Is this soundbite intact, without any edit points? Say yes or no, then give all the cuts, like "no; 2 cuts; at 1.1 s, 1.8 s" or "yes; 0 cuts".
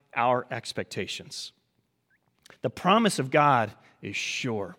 yes; 0 cuts